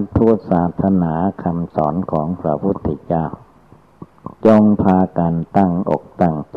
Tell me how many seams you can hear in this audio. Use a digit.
1